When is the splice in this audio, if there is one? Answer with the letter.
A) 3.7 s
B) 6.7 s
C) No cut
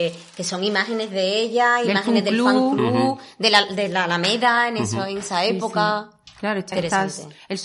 B